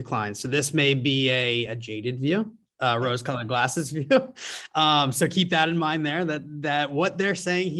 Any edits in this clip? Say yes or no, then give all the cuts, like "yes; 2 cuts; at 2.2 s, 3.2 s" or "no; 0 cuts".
no; 0 cuts